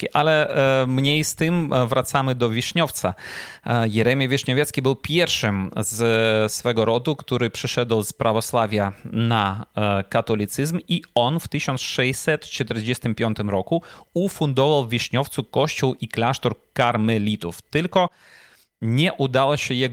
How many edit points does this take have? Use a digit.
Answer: 0